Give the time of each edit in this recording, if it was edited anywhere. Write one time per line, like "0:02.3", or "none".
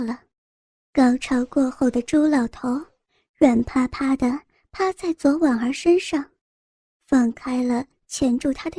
none